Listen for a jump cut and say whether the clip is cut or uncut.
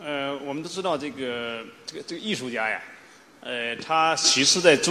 uncut